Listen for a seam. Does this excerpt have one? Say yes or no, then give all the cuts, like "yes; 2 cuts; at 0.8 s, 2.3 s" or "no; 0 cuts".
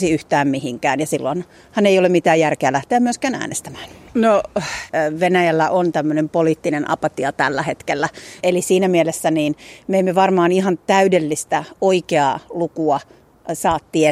yes; 2 cuts; at 4.1 s, 8.4 s